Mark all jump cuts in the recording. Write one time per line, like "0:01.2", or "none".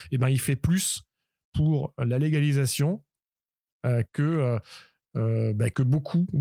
none

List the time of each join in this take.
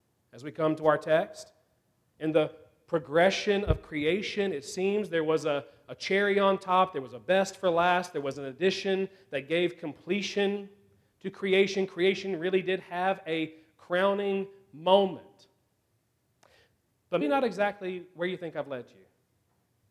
0:17.2

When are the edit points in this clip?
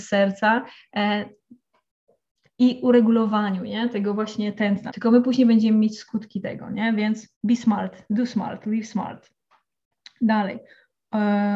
0:04.9
0:07.3

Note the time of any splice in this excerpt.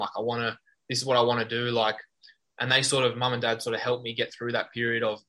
none

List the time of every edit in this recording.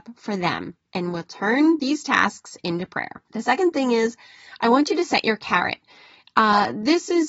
none

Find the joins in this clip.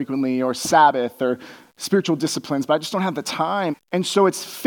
0:03.7

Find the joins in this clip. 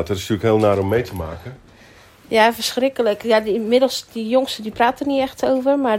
none

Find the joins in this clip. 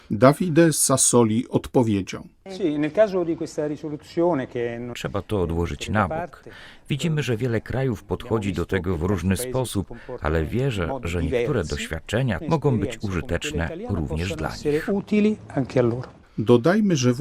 0:04.9
0:12.4

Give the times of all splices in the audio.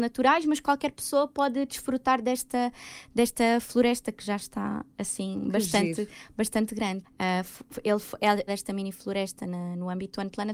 0:07.0
0:08.5

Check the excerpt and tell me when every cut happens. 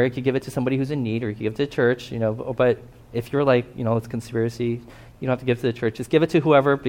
none

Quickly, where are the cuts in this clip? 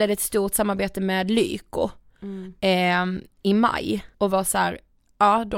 0:04.1

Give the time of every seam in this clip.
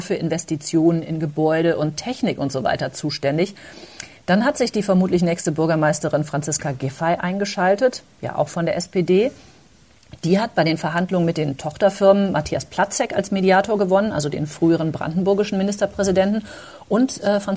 none

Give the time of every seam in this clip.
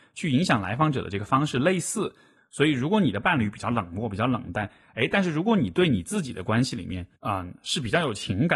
0:02.4
0:07.2

